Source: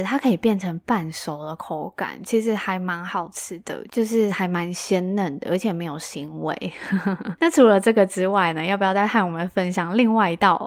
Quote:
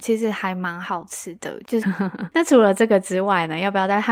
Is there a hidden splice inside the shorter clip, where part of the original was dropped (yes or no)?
yes